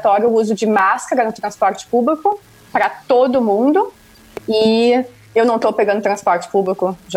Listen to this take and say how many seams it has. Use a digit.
1